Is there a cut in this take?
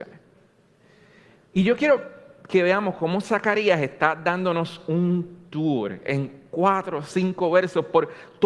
no; 0 cuts

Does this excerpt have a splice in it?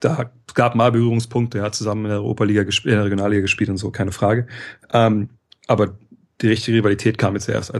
no; 0 cuts

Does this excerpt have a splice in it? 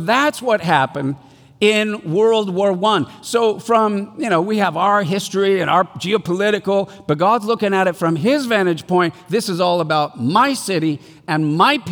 no; 0 cuts

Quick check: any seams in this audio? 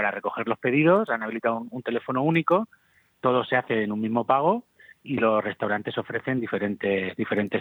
no; 0 cuts

